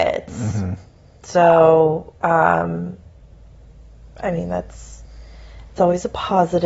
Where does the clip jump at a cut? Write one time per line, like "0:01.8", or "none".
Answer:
none

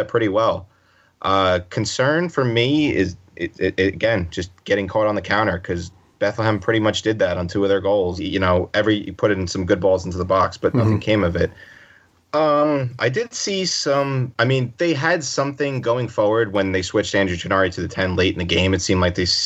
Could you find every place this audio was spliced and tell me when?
0:03.5
0:08.2
0:12.2

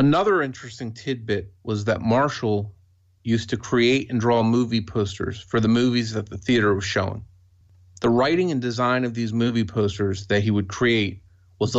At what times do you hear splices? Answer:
none

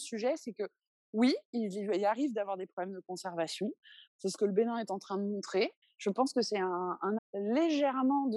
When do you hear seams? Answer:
0:04.1
0:05.8
0:07.2

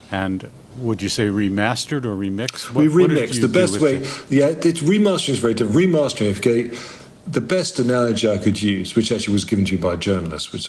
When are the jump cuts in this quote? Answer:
none

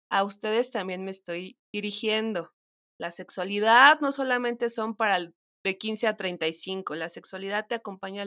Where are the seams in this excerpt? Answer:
none

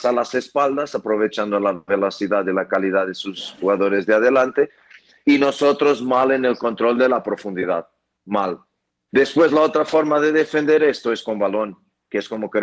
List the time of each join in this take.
0:09.1

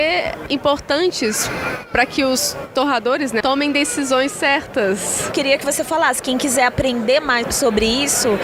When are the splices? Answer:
0:03.4
0:05.3
0:07.4

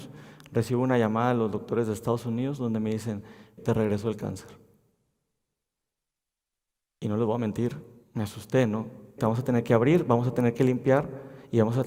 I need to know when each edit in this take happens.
0:03.6
0:09.2

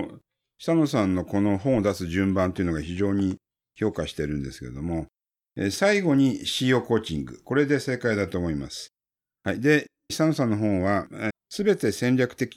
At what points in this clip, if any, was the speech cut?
0:10.1
0:11.3

